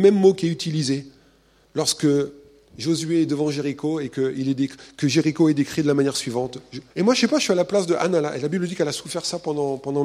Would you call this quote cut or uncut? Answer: cut